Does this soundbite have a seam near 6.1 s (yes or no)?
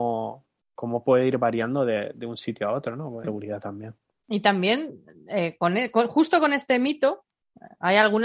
no